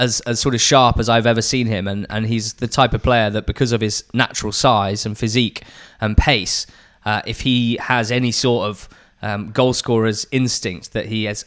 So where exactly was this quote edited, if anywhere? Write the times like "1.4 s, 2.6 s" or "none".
none

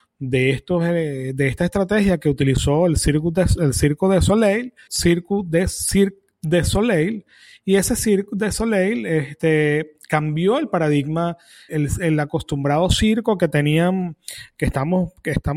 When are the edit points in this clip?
4.9 s, 11.7 s

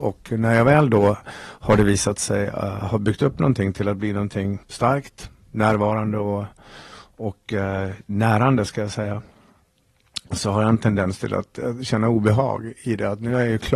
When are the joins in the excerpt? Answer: 4.6 s

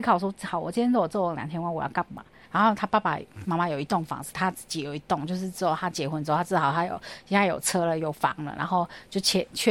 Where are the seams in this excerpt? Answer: 2.5 s

